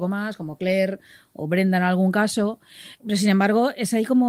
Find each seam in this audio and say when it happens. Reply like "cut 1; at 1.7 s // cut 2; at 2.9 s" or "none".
cut 1; at 3.0 s